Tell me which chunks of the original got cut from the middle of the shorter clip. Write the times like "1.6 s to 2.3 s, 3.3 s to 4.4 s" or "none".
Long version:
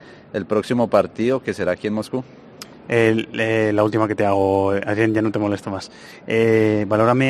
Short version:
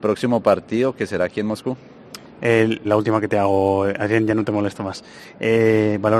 3.3 s to 3.7 s